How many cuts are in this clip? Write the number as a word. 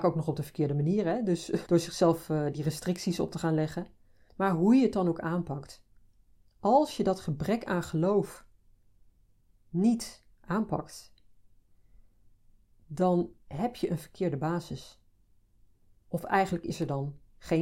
three